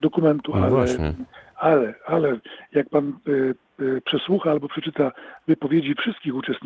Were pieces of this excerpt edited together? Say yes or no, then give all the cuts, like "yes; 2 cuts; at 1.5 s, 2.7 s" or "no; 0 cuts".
no; 0 cuts